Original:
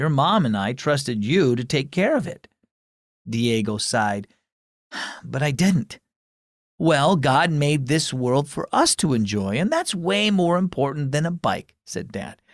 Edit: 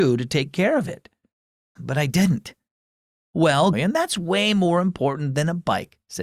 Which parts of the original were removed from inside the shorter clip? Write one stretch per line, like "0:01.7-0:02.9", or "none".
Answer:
0:03.1-0:05.2
0:07.2-0:09.5